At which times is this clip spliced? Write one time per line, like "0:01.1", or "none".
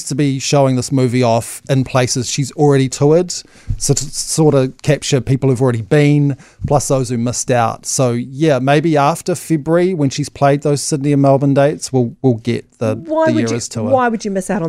none